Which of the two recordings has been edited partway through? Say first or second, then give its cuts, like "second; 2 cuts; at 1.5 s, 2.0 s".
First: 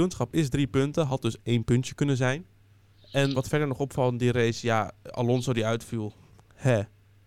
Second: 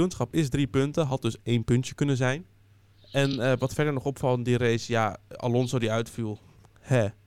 first; 1 cut; at 3.3 s